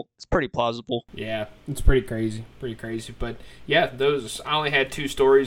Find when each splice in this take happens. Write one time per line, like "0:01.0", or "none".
none